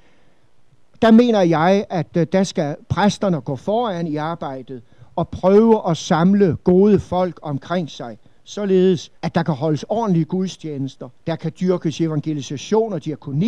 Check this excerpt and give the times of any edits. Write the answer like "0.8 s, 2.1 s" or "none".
9.2 s, 11.2 s